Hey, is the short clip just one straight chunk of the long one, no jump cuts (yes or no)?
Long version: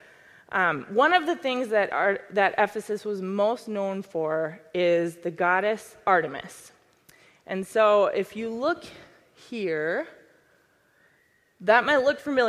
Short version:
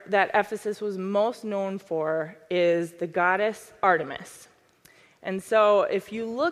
yes